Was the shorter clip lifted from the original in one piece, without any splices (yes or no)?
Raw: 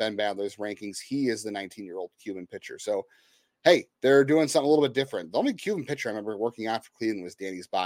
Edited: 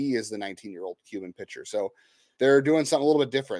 no